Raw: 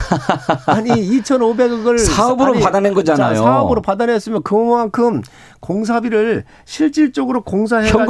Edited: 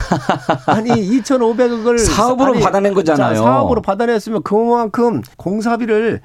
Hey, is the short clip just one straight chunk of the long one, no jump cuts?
no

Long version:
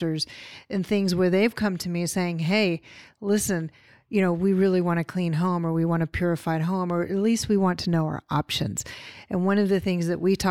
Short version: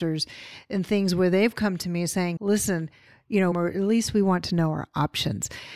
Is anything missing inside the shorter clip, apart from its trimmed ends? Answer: yes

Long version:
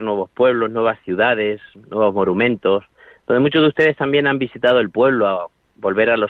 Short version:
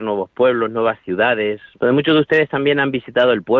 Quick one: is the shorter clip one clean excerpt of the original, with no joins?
no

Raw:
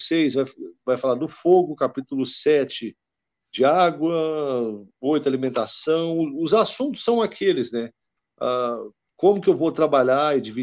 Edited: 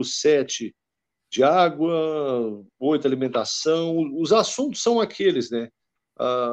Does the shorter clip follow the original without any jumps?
yes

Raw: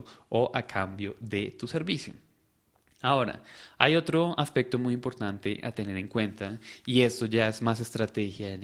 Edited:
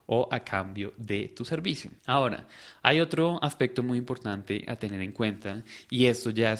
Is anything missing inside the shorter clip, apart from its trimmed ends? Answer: yes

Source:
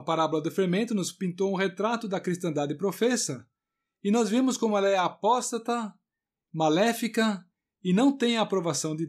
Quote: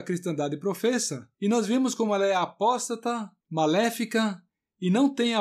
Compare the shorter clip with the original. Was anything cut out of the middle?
yes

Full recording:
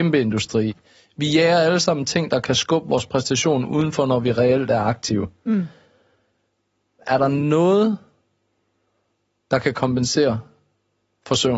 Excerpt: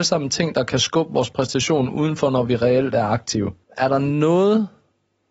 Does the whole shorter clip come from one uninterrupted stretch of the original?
no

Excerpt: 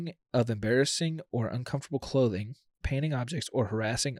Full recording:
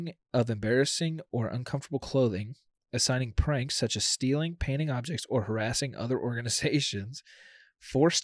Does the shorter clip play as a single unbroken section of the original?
no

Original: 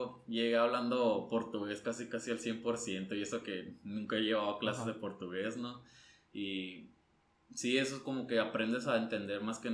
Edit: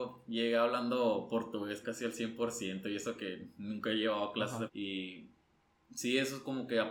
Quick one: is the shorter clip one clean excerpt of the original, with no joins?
no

